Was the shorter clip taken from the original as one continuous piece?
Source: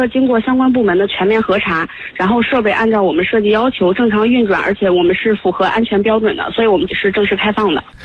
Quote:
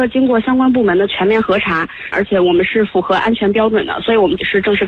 no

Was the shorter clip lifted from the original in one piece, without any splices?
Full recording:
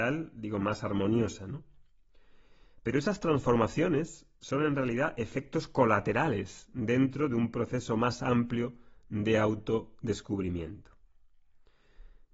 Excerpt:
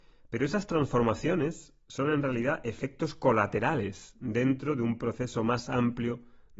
yes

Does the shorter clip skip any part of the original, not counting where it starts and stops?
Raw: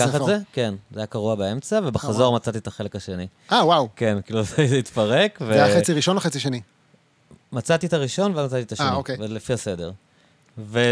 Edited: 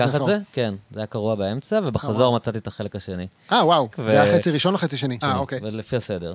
yes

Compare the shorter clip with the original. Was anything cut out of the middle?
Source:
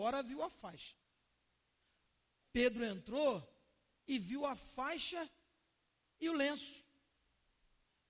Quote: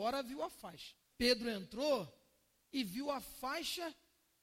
yes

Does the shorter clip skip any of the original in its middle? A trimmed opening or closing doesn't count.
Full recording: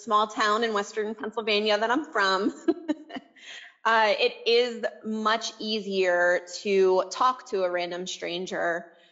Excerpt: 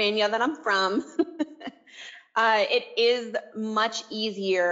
no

